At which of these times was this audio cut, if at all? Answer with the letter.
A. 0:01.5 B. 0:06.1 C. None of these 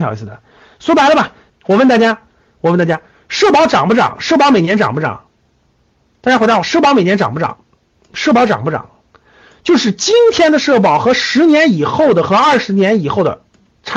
A